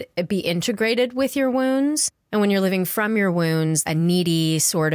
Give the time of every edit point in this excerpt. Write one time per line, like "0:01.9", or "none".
0:03.8